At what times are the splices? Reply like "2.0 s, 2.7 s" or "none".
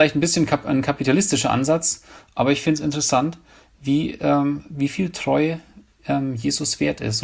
none